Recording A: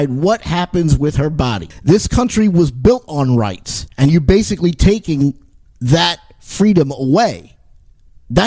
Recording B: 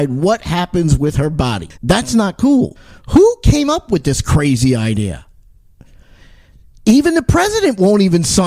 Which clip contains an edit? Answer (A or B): B